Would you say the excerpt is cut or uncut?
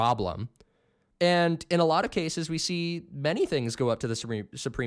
cut